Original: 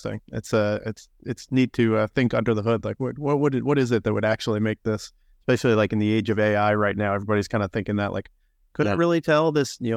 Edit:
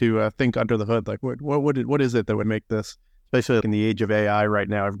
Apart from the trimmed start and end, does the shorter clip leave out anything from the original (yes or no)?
yes